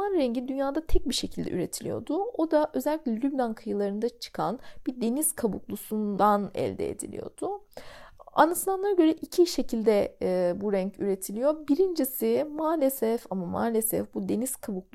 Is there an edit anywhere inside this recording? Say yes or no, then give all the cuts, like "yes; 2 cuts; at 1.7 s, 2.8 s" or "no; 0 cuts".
no; 0 cuts